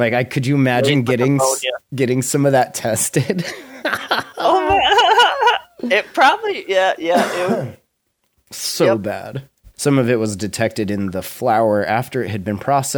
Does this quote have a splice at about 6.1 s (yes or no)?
no